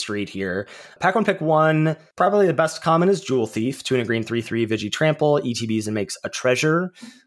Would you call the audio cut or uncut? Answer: uncut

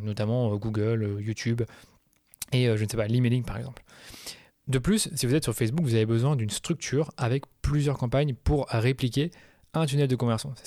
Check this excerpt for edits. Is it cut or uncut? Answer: uncut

